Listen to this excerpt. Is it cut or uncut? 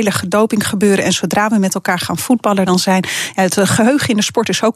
uncut